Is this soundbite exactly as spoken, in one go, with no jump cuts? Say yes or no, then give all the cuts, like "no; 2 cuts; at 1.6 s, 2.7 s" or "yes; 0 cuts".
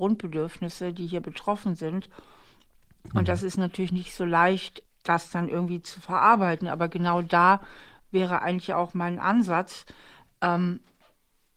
yes; 0 cuts